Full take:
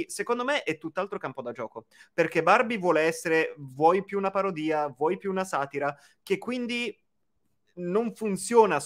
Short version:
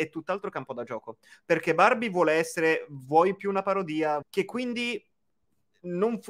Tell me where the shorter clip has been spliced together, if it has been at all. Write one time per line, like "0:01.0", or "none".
0:04.2